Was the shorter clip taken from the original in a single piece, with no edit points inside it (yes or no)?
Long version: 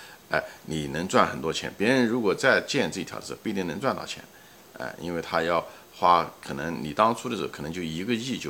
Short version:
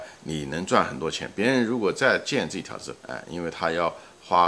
no